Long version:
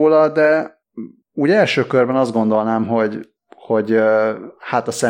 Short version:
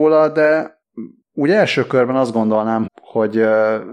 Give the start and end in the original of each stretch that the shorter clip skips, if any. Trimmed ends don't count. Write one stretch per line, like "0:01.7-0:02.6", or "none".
0:02.9-0:03.4

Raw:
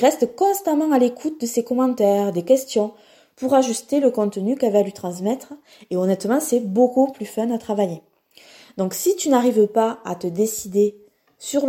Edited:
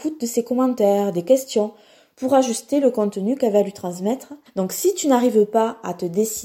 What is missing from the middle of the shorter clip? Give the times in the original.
0:05.7-0:08.7

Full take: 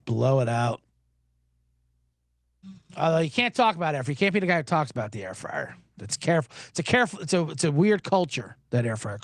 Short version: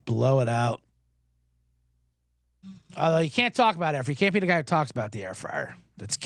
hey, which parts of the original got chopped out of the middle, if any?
none

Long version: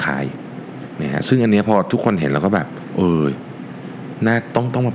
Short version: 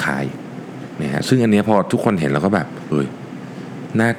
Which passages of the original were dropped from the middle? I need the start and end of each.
0:02.9-0:03.2

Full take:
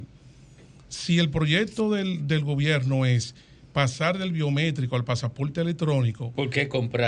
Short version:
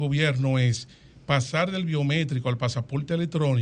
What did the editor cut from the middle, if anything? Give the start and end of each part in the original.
none

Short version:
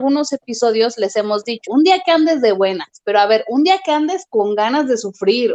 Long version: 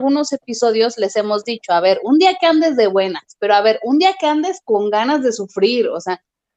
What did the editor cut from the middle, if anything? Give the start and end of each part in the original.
0:01.7-0:02.0

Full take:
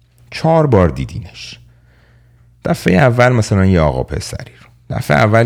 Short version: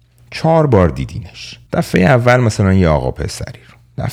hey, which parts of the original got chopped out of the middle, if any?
0:01.7-0:02.6

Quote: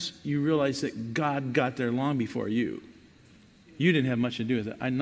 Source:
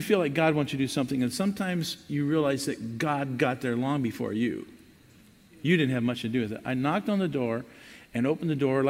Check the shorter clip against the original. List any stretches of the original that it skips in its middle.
none

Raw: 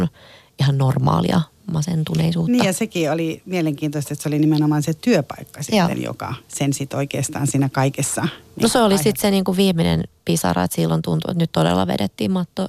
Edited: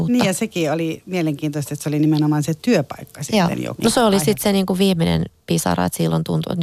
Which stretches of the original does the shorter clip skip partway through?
0:06.1-0:08.5

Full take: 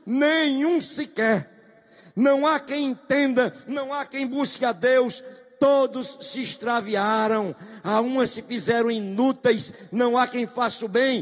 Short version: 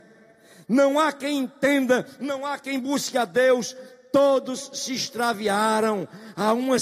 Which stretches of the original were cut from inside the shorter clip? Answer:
none

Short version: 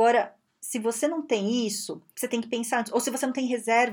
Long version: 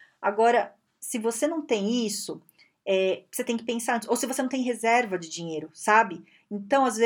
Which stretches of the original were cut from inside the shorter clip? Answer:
0:02.5-0:03.3

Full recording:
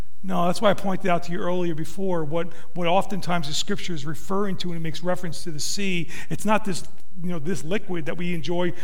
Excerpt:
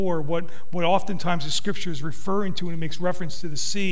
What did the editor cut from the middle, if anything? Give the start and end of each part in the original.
none

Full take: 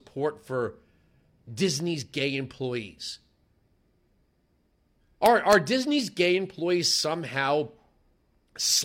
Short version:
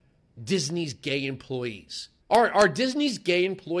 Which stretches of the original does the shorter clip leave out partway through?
0:03.3-0:05.1

